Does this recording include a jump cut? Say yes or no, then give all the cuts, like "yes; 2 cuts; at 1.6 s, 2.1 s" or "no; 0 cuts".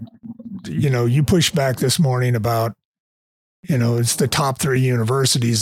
no; 0 cuts